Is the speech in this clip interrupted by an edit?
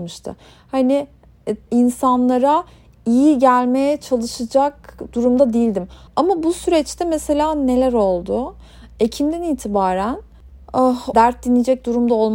yes; 3 cuts; at 1.7 s, 6.1 s, 11.1 s

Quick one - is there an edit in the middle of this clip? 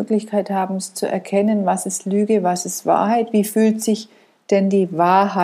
no; 0 cuts

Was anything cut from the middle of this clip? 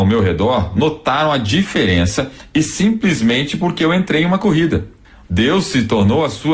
yes; 1 cut; at 5.2 s

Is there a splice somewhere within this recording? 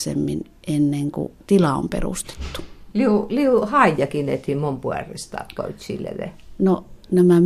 yes; 2 cuts; at 1.4 s, 2.9 s

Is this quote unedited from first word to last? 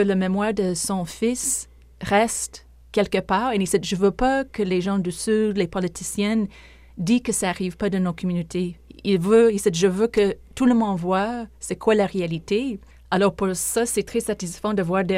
yes; 0 cuts

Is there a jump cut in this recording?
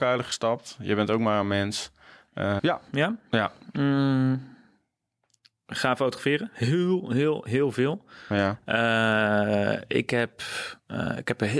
yes; 1 cut; at 2.6 s

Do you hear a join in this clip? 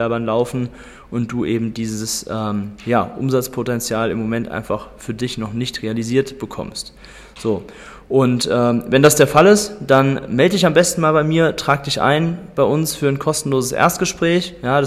no; 0 cuts

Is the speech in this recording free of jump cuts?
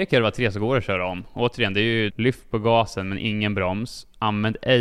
no; 1 cut; at 2.1 s

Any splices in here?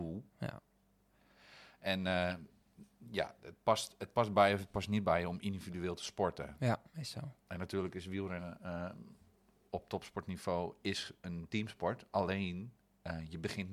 no; 0 cuts

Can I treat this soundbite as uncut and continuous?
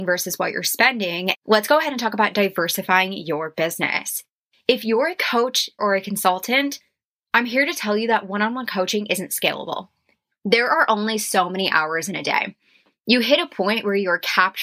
no; 2 cuts; at 1.3 s, 5.8 s

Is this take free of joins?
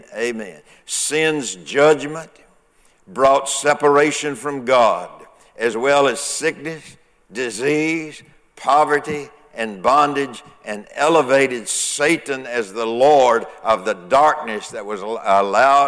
yes; 0 cuts

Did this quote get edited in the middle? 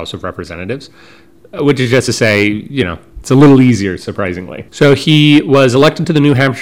yes; 1 cut; at 4.7 s

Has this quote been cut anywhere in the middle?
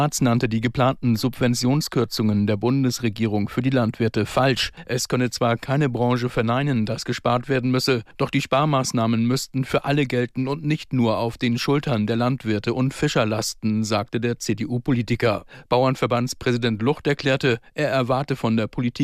no; 0 cuts

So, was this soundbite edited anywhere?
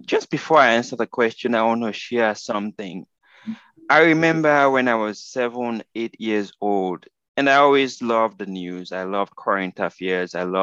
no; 0 cuts

